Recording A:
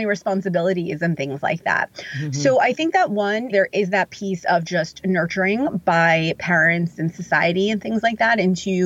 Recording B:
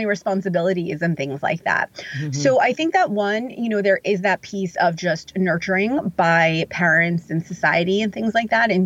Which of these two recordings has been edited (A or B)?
A